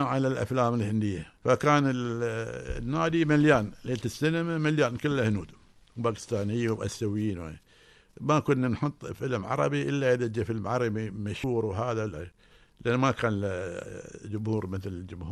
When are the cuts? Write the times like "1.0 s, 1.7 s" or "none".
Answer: none